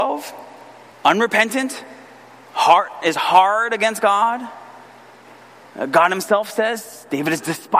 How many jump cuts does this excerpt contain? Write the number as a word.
one